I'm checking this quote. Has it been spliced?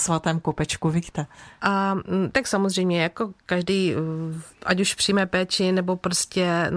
yes; 2 cuts; at 1.6 s, 4.5 s

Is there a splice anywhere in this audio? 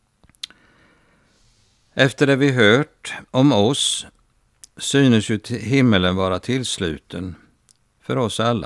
yes; 1 cut; at 3.3 s

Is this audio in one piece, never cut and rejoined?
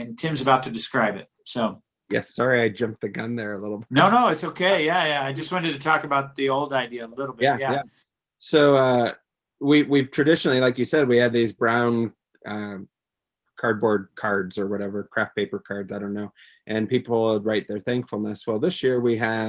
yes; 0 cuts

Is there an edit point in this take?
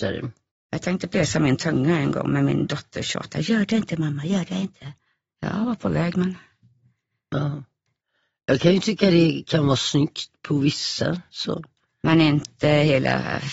no; 0 cuts

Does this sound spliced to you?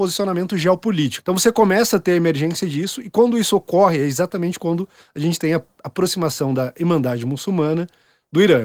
yes; 1 cut; at 1.2 s

